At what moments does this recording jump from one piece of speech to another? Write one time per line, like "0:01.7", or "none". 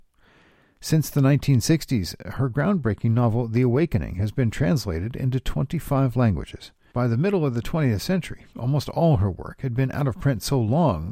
0:06.9